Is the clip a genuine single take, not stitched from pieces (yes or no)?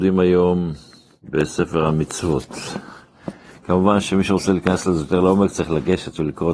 yes